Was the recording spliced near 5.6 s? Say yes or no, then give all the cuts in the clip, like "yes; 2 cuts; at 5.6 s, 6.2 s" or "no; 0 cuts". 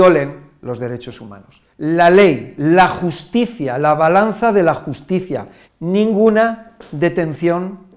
yes; 2 cuts; at 1.7 s, 5.6 s